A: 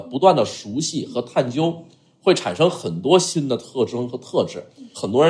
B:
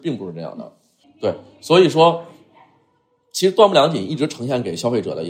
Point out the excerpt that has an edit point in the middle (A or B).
B